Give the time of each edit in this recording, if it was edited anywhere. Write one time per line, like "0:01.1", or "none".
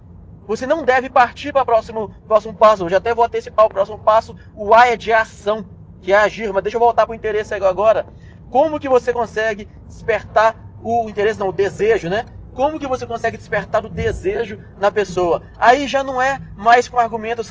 none